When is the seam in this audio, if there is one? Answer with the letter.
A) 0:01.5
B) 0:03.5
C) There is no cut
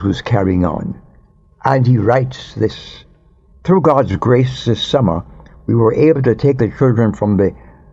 B